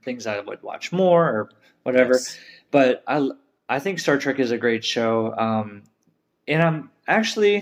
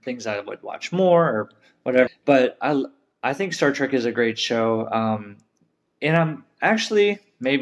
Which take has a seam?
second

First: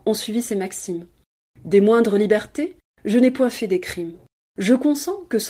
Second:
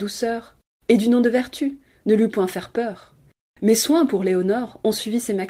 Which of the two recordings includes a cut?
first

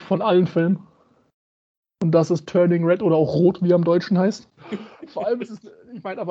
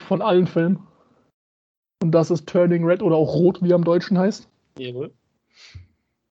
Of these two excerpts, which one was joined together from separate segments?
first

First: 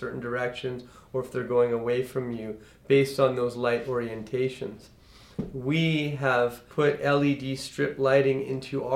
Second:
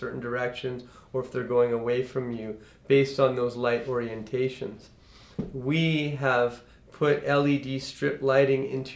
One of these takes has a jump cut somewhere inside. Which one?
first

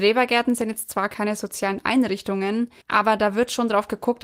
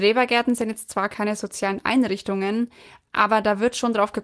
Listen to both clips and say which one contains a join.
first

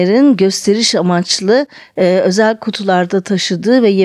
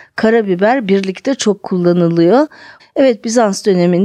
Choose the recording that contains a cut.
second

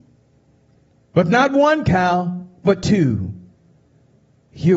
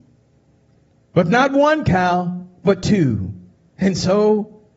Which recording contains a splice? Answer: second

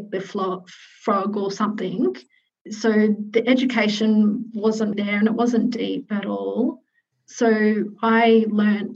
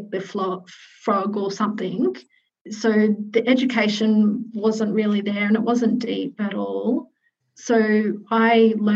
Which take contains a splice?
first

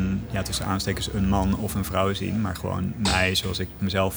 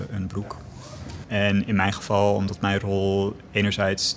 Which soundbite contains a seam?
second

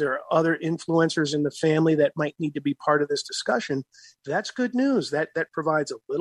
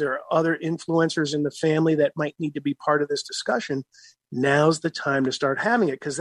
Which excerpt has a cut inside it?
first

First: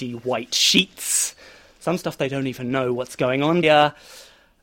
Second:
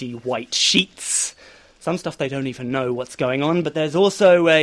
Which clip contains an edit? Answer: first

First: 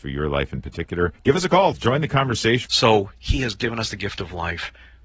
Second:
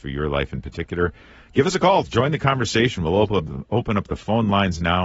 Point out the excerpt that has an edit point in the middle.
first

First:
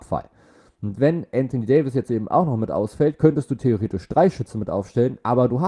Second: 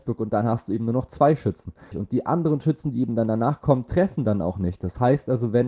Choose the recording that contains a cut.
second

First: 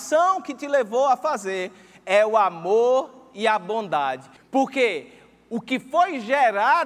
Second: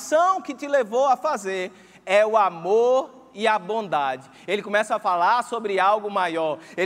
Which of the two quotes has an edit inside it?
first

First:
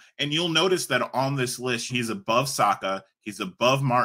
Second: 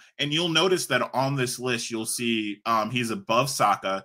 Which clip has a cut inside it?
first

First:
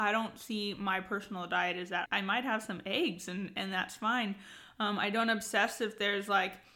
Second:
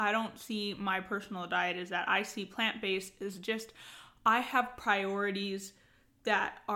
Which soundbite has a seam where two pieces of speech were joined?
first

